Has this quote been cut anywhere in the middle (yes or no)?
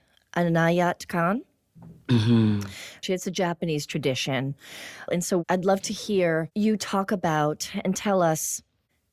yes